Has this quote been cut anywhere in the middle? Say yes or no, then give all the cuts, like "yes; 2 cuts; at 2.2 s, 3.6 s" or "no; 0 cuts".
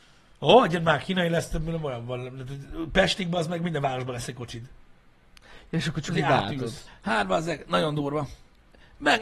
yes; 1 cut; at 6.9 s